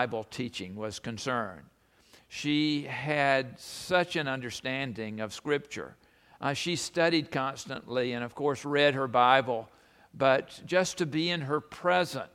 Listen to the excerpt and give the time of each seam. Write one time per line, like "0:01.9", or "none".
none